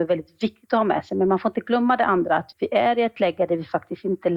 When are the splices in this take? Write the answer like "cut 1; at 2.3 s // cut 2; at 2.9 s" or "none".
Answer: cut 1; at 2.5 s